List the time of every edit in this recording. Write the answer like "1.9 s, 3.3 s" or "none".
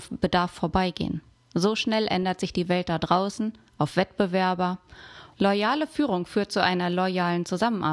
3.7 s, 5.3 s